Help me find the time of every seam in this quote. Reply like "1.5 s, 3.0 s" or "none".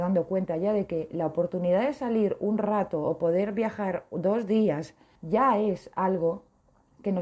5.1 s